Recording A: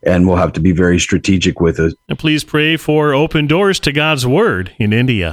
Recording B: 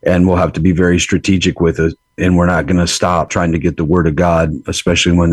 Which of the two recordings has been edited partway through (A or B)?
A